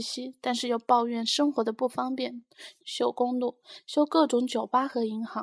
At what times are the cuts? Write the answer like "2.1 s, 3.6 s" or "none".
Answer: 2.8 s